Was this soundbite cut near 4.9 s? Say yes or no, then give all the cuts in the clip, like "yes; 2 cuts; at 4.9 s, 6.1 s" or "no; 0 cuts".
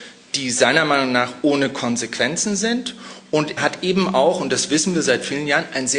no; 1 cut; at 3.6 s